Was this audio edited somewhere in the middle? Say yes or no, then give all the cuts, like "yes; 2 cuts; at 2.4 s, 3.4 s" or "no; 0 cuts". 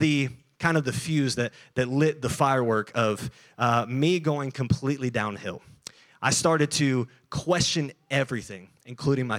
no; 0 cuts